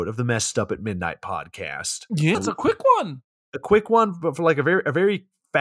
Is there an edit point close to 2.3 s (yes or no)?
yes